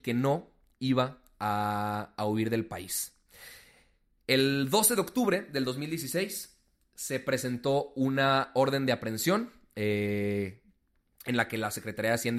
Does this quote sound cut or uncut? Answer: uncut